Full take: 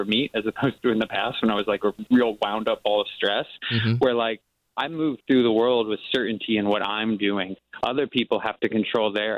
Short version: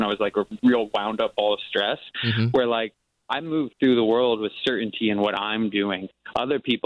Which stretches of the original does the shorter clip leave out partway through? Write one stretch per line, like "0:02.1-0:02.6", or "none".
none

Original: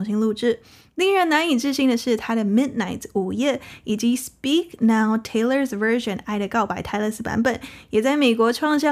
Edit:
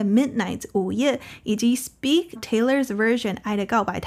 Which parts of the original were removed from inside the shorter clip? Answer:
0:04.8-0:05.2

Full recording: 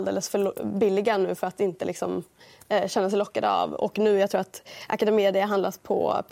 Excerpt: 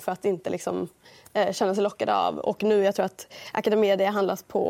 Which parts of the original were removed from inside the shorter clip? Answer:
none

